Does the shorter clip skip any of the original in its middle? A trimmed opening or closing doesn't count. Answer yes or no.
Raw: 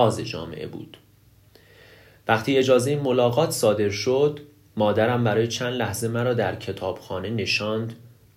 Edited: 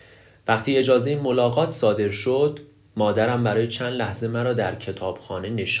no